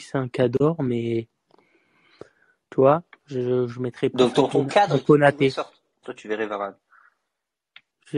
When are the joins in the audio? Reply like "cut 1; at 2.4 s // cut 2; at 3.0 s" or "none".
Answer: cut 1; at 6.0 s